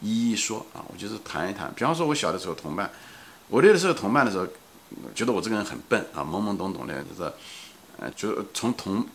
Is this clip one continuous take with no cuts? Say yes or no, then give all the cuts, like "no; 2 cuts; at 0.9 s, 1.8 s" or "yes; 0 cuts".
no; 3 cuts; at 5.1 s, 7.0 s, 8.1 s